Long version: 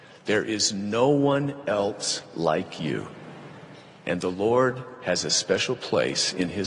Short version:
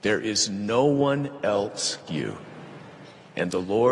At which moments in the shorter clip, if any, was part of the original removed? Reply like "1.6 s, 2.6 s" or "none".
2.1 s